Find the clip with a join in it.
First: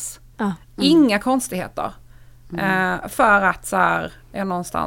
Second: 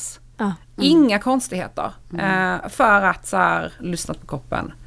second; 2 cuts; at 2.0 s, 3.8 s

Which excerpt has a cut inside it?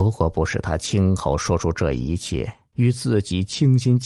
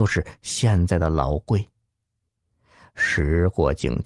first; 1 cut; at 2.7 s

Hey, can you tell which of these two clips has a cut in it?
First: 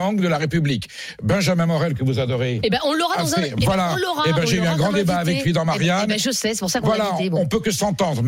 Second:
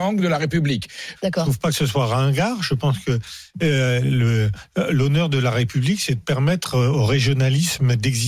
second; 1 cut; at 1.2 s

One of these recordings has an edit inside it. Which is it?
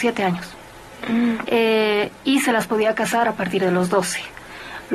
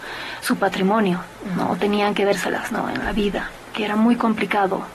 first; 1 cut; at 1.4 s

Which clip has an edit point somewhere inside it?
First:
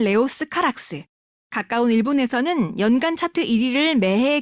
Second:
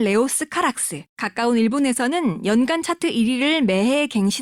second; 1 cut; at 1.1 s

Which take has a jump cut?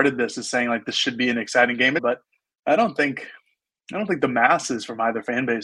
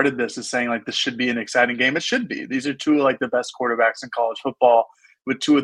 first; 1 cut; at 2.0 s

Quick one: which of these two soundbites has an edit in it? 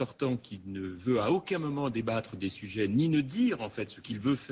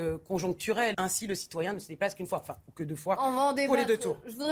second; 1 cut; at 0.9 s

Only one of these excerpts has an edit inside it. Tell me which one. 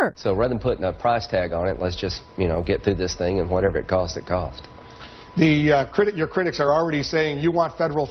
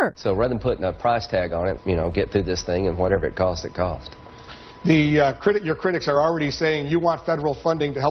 second; 1 cut; at 1.8 s

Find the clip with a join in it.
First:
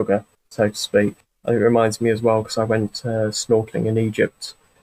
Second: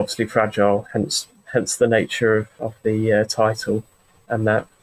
first; 1 cut; at 1.4 s

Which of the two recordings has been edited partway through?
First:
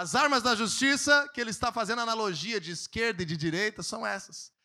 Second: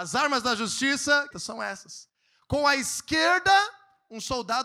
second; 1 cut; at 1.3 s

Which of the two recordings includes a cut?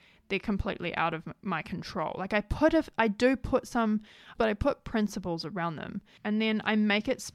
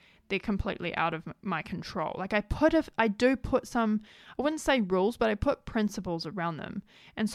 first; 2 cuts; at 4.4 s, 6.2 s

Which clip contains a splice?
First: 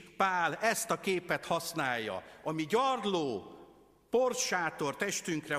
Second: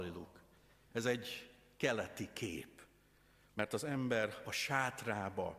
second; 1 cut; at 0.9 s

